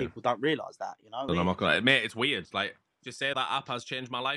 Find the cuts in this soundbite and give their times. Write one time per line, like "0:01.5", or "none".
0:01.3
0:03.3